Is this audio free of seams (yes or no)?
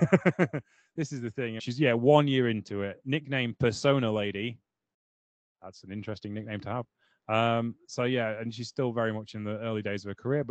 no